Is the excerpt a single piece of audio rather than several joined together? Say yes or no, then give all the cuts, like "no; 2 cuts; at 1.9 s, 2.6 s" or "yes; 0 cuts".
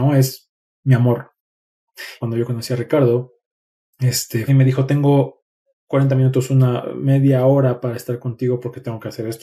no; 2 cuts; at 2.2 s, 4.5 s